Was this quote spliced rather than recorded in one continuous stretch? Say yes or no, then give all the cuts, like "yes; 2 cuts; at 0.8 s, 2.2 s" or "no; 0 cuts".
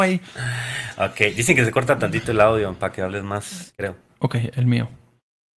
yes; 1 cut; at 3.7 s